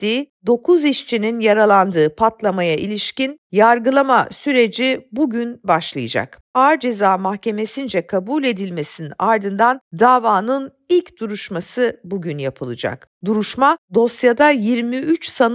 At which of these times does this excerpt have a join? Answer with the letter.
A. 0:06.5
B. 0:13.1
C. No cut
A